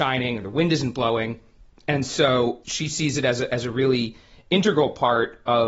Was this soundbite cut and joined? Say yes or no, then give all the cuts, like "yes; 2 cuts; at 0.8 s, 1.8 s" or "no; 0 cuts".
no; 0 cuts